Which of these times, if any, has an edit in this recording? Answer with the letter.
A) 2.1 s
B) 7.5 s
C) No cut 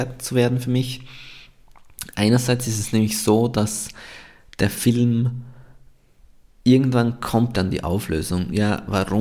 B